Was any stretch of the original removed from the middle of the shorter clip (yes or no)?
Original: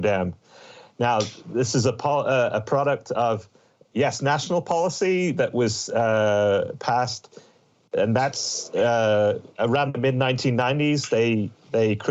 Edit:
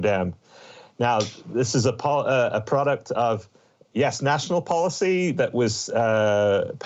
no